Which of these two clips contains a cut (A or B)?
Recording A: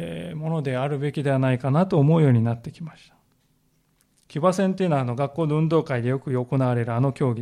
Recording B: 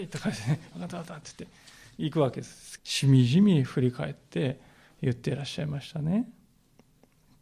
B